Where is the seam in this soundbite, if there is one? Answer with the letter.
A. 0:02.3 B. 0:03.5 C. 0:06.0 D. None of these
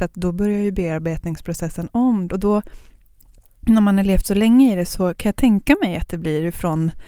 A